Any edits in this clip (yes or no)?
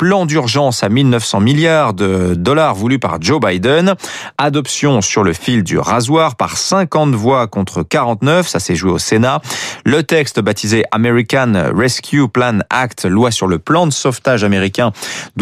no